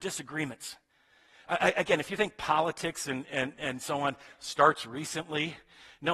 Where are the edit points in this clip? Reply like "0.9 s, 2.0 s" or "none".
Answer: none